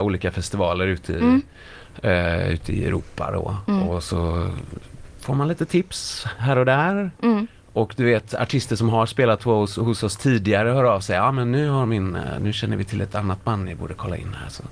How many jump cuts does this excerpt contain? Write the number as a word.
zero